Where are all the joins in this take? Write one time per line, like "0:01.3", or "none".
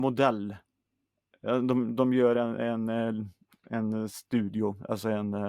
none